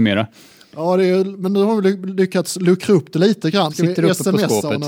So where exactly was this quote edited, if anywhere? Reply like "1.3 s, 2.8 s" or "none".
3.7 s